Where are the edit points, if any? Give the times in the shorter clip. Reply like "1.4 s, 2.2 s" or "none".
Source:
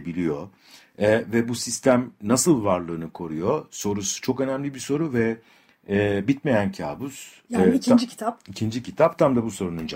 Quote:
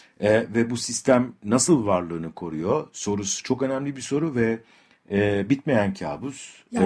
none